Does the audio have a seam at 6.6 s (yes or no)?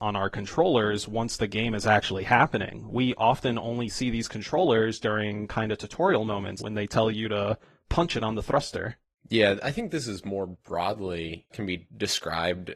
yes